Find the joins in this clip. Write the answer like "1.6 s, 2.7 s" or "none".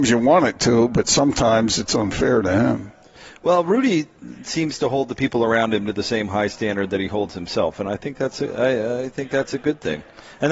none